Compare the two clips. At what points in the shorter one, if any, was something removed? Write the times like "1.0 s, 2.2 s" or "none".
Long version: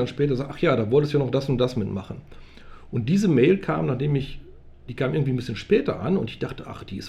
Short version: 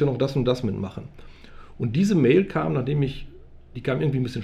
none